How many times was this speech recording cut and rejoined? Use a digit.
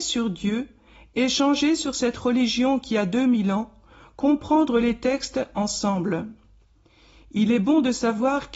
0